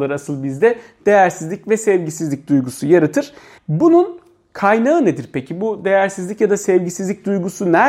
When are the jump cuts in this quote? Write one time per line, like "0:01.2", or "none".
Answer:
0:03.6